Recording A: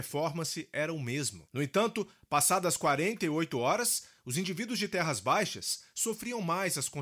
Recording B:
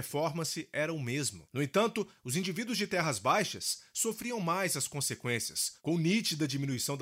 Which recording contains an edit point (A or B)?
B